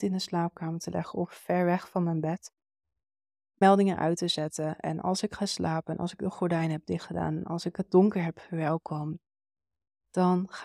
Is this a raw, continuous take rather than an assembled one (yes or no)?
yes